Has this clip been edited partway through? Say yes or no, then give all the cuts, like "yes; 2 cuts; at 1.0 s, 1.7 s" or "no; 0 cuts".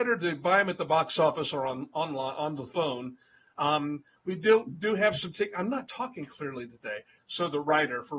yes; 1 cut; at 7.2 s